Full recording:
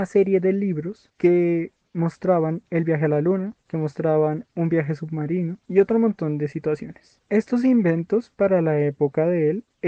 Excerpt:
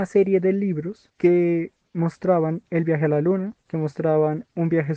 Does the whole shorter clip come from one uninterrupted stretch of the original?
yes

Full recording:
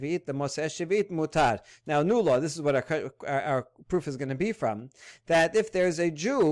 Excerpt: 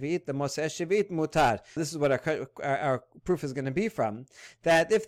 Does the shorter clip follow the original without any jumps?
no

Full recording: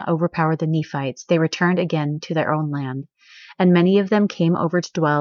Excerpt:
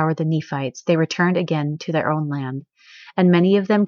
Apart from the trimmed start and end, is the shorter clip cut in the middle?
no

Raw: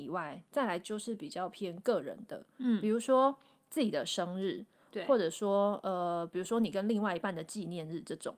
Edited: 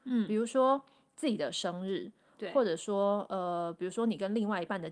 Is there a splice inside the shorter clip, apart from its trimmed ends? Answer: no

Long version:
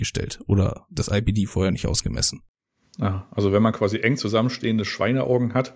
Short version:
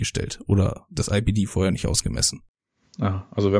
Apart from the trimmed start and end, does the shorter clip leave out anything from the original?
no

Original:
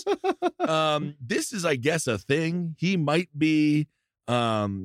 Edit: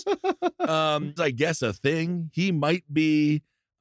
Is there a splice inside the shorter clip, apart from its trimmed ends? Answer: yes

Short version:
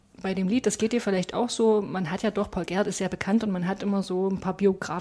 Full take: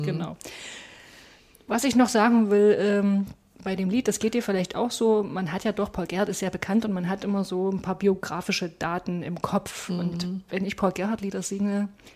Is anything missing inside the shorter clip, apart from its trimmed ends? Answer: no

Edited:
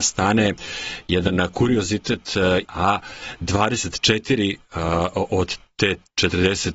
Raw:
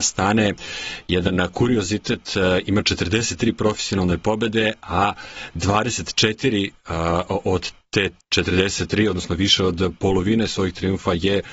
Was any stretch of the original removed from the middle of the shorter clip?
yes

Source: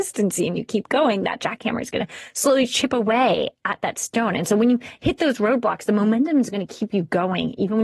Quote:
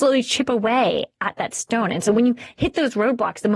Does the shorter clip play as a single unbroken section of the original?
yes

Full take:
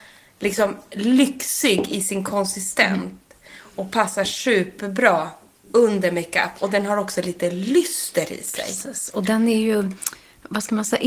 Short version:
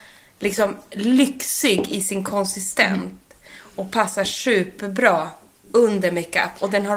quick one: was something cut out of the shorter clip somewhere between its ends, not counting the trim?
no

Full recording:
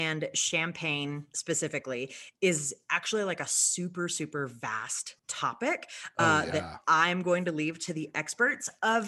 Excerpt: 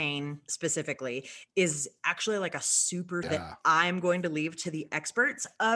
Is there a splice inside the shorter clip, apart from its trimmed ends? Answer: yes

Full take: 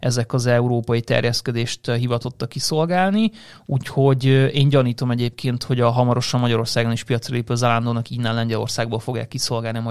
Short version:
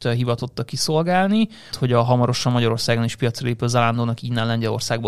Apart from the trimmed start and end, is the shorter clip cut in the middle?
yes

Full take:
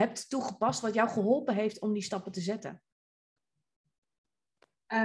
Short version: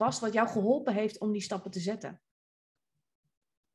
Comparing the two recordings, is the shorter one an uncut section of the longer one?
yes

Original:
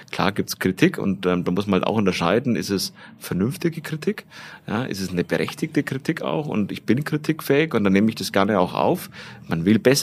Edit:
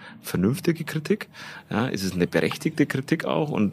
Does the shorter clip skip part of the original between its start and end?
no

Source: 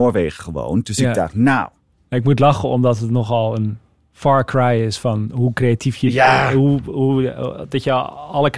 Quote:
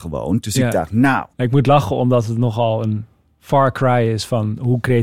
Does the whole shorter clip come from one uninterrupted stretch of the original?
no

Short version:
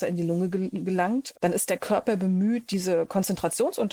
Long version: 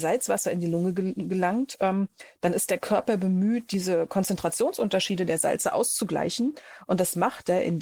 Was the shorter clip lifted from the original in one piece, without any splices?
no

